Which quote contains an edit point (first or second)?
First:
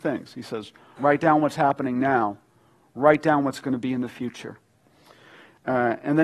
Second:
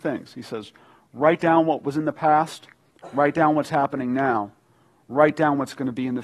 first